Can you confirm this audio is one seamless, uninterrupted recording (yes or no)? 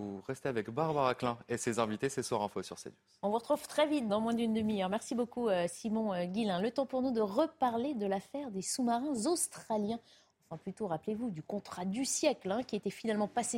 no